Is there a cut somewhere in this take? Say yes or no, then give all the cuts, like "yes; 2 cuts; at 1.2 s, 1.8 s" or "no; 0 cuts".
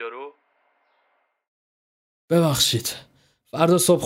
no; 0 cuts